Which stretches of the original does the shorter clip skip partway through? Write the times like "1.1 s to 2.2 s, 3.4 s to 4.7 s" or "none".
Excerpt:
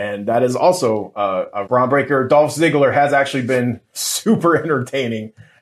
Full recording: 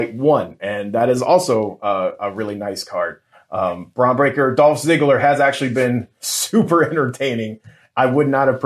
2.3 s to 3.9 s